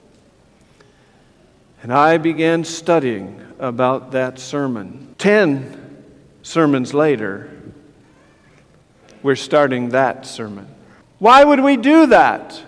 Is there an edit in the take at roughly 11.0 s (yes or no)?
yes